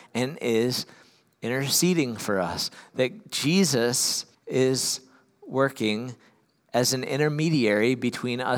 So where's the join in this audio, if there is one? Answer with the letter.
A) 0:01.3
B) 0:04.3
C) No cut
B